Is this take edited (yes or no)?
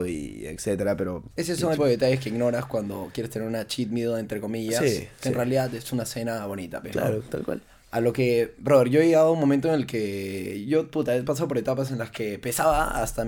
yes